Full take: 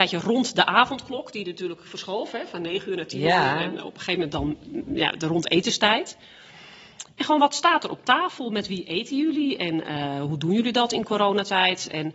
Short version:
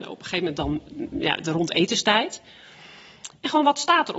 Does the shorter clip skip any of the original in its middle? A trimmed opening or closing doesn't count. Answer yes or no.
no